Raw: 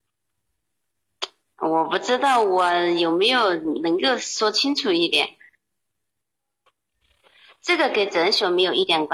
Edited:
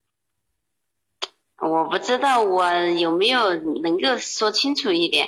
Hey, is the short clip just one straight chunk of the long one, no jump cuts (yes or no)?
yes